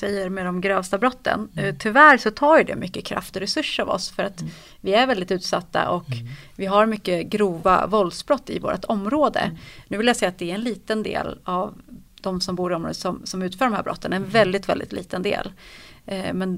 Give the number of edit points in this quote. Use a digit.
0